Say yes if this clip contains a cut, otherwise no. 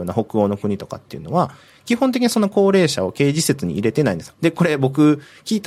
yes